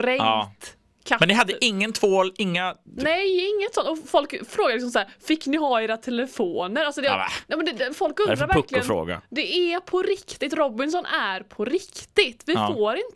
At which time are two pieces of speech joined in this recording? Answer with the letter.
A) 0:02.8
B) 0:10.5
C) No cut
C